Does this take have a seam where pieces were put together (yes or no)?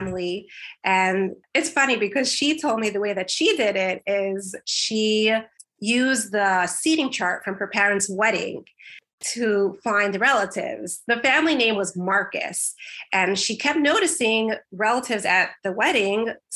no